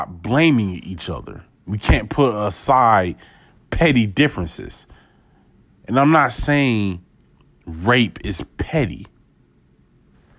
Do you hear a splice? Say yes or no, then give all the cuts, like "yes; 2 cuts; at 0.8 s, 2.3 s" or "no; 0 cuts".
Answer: no; 0 cuts